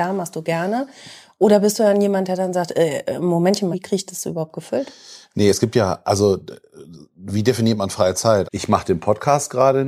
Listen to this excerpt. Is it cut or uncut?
cut